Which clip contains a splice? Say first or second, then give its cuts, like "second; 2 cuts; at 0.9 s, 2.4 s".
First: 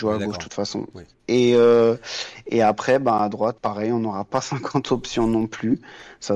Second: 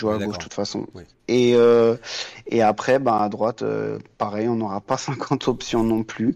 first; 1 cut; at 3.6 s